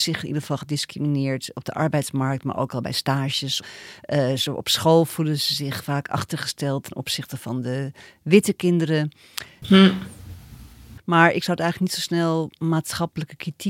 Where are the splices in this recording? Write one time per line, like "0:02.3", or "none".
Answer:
0:09.6
0:11.0